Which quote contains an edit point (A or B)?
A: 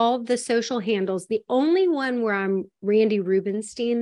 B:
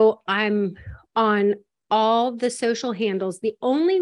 A